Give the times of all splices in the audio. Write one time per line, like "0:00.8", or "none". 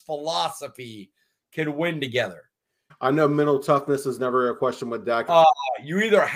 0:02.9
0:05.3